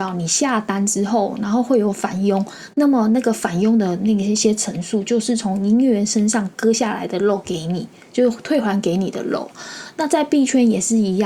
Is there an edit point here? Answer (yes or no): no